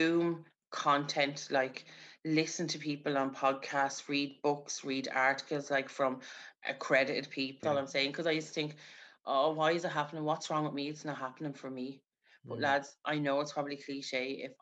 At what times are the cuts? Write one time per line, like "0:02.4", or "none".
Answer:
0:07.6